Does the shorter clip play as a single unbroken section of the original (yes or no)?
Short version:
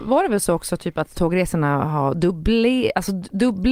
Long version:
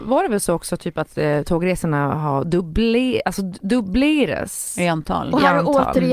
no